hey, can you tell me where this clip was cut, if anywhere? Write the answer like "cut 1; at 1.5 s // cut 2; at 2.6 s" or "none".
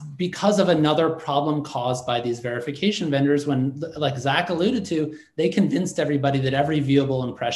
none